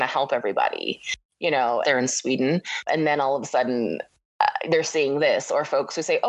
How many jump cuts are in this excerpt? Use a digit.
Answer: 2